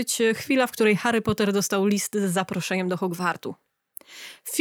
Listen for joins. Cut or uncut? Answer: uncut